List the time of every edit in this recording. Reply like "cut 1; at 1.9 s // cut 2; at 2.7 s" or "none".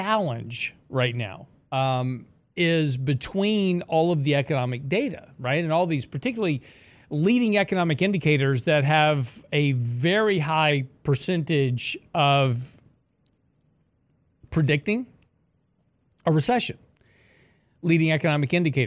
none